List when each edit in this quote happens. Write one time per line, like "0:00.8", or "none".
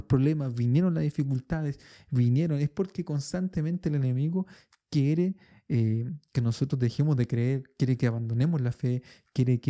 none